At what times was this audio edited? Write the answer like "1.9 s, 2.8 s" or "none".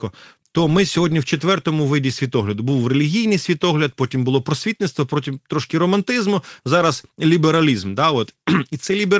none